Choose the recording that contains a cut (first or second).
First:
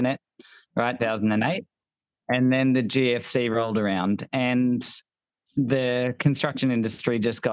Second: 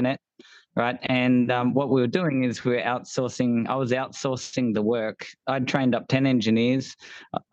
first